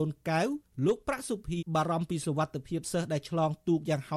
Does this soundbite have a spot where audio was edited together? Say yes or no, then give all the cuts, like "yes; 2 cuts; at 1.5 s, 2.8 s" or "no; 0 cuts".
yes; 1 cut; at 1.6 s